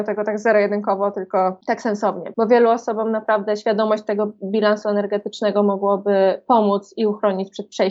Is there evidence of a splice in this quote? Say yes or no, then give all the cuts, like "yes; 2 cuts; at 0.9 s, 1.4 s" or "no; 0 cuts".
yes; 1 cut; at 2.3 s